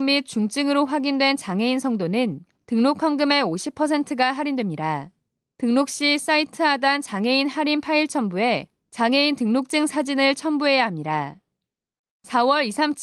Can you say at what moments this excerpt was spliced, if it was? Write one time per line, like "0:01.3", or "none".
none